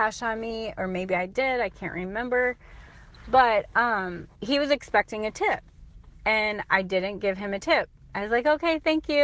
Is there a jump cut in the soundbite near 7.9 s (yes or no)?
no